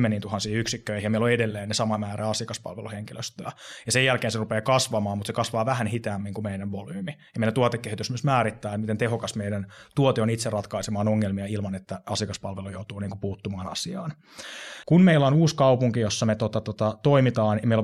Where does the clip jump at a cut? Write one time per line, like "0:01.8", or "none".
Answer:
0:14.8